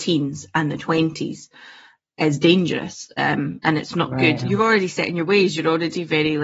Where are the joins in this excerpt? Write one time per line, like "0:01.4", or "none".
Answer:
0:04.4